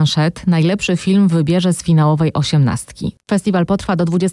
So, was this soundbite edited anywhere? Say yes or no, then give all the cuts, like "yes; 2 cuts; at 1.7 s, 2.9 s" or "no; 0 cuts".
yes; 1 cut; at 3.2 s